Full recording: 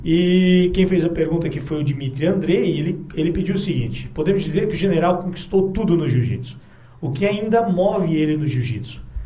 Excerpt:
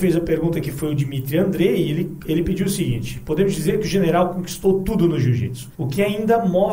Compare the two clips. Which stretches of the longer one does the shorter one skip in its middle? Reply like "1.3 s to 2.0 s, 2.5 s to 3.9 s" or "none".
6.6 s to 7.0 s